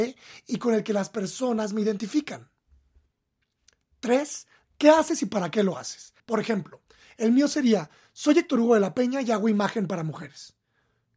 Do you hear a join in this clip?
yes; 2 cuts; at 4.6 s, 6.2 s

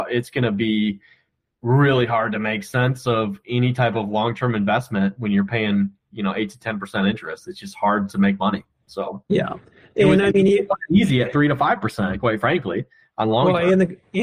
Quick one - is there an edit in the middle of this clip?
no; 0 cuts

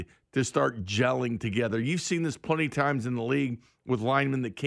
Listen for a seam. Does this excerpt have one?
no; 0 cuts

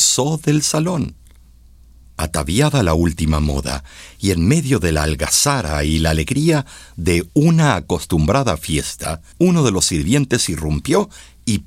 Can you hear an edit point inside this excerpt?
yes; 2 cuts; at 2.0 s, 9.3 s

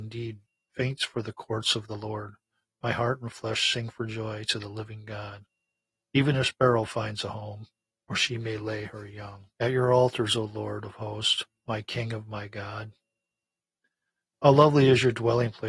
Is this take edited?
yes; 3 cuts; at 7.9 s, 9.5 s, 14.3 s

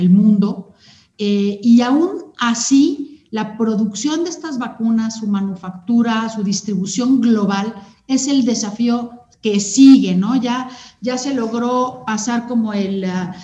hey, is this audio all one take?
yes; 0 cuts

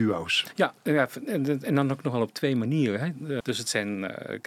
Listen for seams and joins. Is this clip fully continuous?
no; 1 cut; at 3.4 s

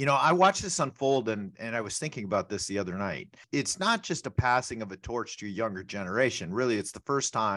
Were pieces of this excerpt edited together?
no; 0 cuts

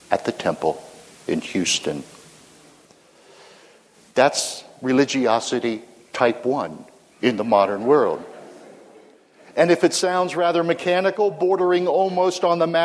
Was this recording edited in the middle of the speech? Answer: no; 0 cuts

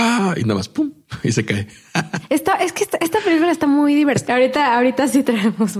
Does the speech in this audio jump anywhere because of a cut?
yes; 1 cut; at 4.3 s

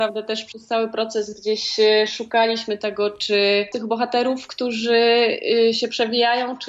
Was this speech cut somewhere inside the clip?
yes; 1 cut; at 3.7 s

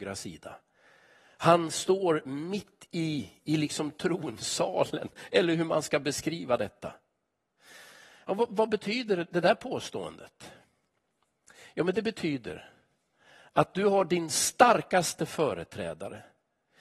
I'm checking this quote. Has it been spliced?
no; 0 cuts

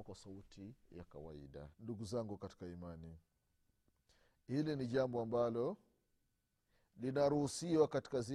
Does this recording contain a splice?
yes; 1 cut; at 1.7 s

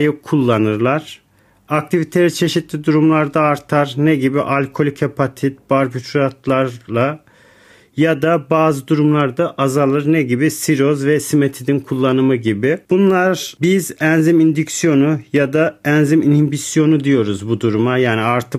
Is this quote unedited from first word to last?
yes; 0 cuts

